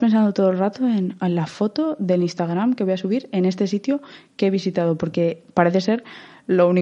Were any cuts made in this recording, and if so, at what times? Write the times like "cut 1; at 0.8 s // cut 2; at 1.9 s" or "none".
none